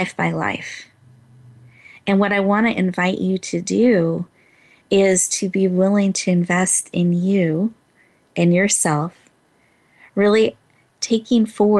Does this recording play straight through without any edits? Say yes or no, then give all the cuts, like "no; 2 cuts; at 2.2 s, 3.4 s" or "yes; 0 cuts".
yes; 0 cuts